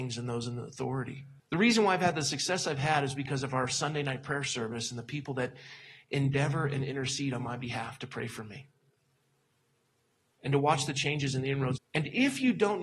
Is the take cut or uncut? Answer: cut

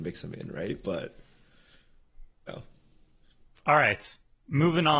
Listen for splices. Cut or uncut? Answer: cut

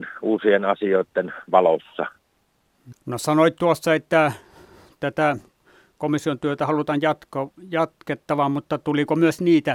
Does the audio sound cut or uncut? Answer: cut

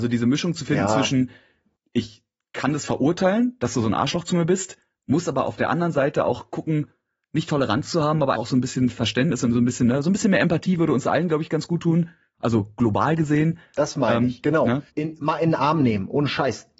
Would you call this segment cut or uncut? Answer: cut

